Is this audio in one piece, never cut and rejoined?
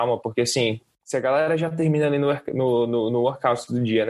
yes; 0 cuts

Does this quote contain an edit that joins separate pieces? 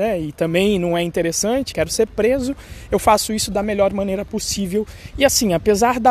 yes; 2 cuts; at 1.7 s, 5.1 s

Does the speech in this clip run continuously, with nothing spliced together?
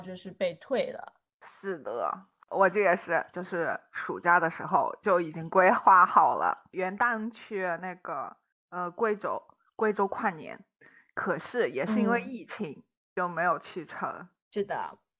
no; 1 cut; at 3.3 s

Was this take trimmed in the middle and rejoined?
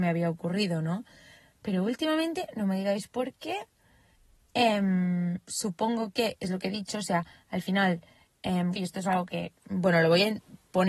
yes; 1 cut; at 8.8 s

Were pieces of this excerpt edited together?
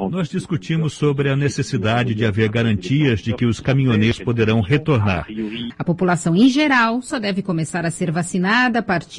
yes; 1 cut; at 5.7 s

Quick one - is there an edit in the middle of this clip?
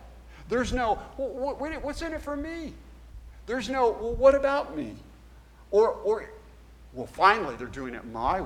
no; 0 cuts

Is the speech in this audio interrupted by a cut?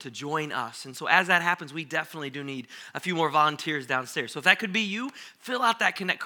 no; 0 cuts

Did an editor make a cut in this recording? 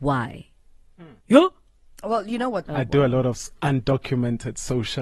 yes; 2 cuts; at 1.2 s, 2.7 s

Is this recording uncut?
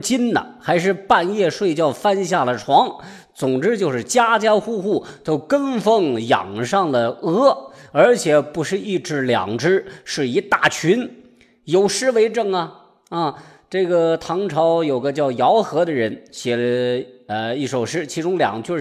yes; 0 cuts

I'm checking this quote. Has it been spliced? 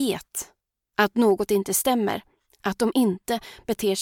no; 0 cuts

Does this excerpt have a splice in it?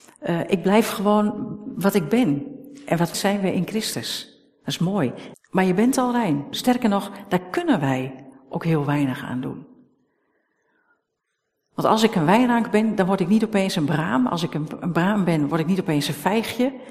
yes; 3 cuts; at 3.1 s, 5.3 s, 6.5 s

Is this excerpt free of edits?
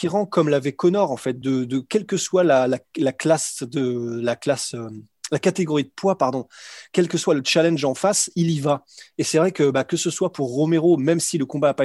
yes; 0 cuts

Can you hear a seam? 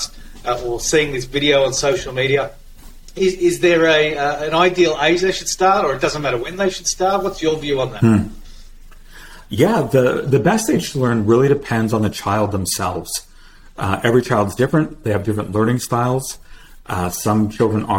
no; 0 cuts

